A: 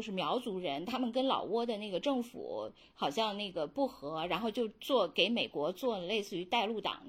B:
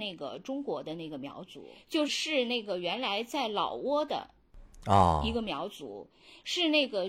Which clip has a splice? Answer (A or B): B